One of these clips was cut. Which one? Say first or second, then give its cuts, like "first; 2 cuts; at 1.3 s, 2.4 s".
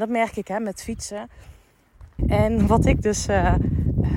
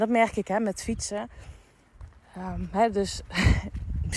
first; 1 cut; at 2.2 s